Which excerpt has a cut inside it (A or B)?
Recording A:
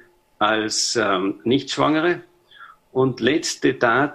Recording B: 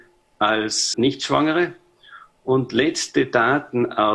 B